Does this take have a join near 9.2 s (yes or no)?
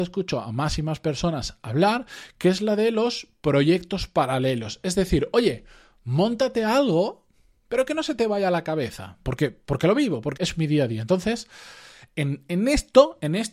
yes